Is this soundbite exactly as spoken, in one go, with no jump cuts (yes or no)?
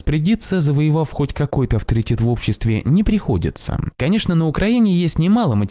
no